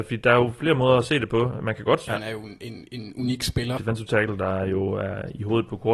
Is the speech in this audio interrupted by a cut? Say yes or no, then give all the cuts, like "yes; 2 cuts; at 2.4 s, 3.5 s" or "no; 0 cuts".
yes; 2 cuts; at 2.1 s, 3.8 s